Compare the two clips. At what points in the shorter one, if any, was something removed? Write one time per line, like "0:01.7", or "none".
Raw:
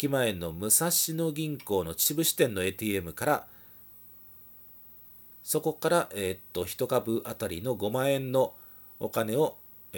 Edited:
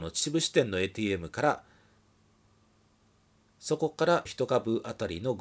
0:04.3